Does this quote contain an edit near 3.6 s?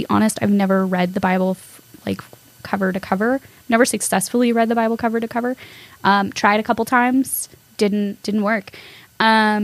no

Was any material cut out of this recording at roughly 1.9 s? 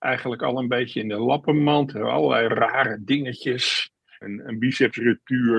no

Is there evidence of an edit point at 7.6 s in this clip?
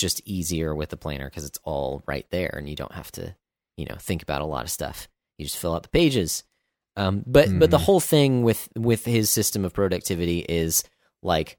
no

